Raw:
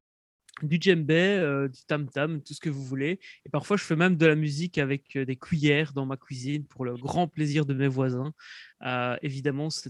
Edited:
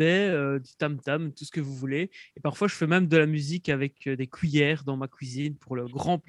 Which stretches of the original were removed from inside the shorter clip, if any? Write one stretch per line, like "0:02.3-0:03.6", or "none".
none